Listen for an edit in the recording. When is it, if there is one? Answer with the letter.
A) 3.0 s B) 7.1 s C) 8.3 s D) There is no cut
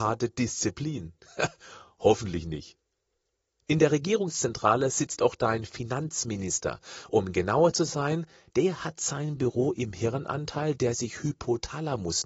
D